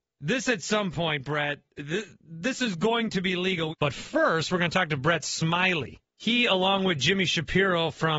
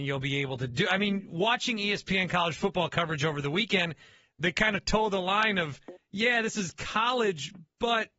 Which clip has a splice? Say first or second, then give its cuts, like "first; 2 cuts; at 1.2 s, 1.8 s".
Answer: first; 1 cut; at 3.7 s